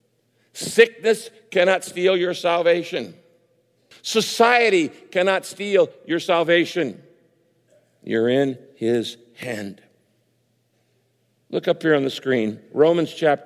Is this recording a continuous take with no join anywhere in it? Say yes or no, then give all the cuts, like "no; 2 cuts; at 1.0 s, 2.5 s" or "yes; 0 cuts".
no; 1 cut; at 3.9 s